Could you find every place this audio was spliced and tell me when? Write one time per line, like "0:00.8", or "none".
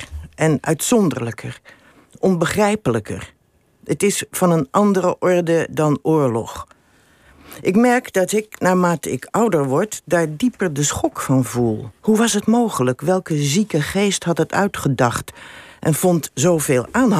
0:12.0